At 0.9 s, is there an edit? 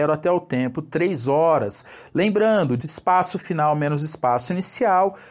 no; 1 cut; at 2.8 s

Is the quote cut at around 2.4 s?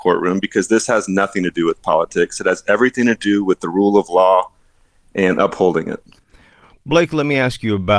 no; 0 cuts

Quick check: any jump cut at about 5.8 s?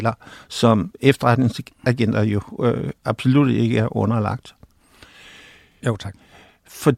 yes; 1 cut; at 5.8 s

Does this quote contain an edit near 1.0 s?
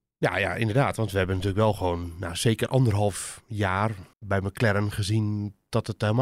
no; 1 cut; at 4.1 s

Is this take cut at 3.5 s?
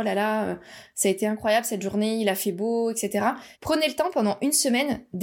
yes; 1 cut; at 3.5 s

